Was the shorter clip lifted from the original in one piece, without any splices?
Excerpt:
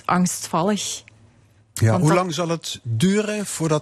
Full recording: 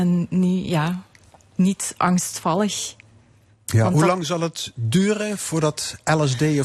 yes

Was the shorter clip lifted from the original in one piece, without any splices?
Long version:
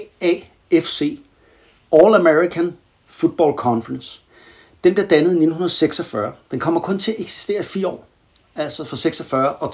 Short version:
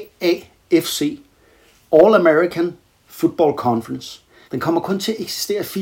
no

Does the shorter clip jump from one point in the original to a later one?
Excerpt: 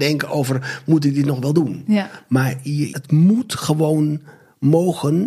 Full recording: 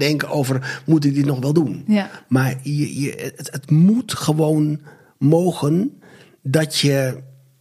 yes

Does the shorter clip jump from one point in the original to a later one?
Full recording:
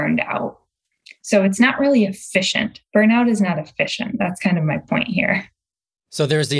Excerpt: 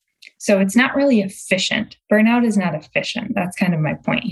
no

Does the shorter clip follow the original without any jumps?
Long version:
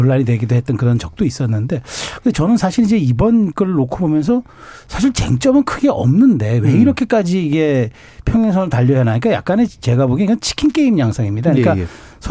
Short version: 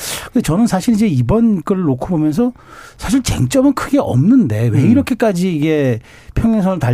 yes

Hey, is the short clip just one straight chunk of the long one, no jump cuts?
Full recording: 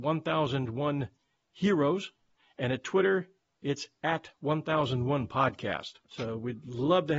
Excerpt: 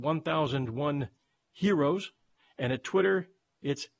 yes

